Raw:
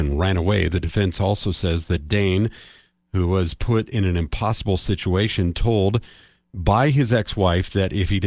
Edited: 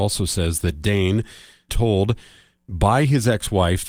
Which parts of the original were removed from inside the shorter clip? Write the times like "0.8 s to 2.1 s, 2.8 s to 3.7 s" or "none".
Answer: 3.0 s to 5.5 s